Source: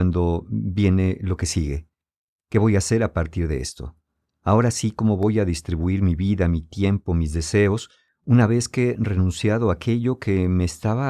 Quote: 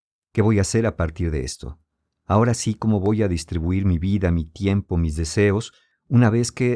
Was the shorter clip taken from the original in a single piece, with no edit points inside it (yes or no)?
yes